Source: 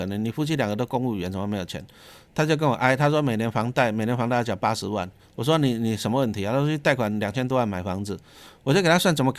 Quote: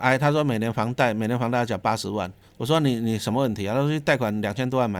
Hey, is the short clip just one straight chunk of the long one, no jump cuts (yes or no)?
yes